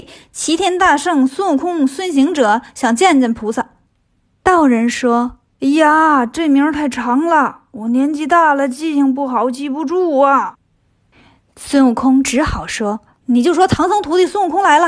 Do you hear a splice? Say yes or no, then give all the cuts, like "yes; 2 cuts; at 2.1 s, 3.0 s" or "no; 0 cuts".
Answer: no; 0 cuts